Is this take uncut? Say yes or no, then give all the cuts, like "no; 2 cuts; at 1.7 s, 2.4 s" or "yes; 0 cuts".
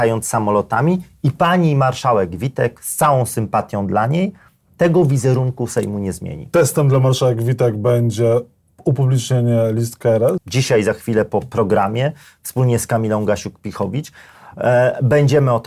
no; 1 cut; at 10.4 s